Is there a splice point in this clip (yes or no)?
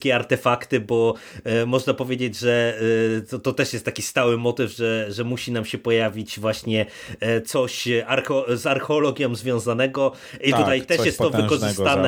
no